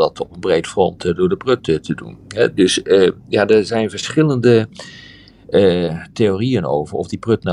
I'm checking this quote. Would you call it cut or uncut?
uncut